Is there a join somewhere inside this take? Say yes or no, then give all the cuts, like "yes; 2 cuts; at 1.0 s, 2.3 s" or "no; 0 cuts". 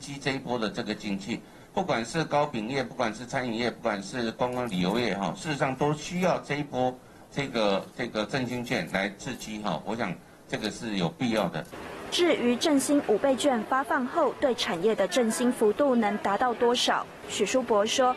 no; 0 cuts